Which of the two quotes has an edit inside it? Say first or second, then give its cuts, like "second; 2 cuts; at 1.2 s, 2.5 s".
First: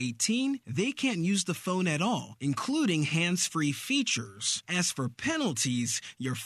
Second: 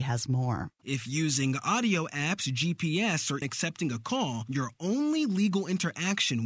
second; 1 cut; at 3.4 s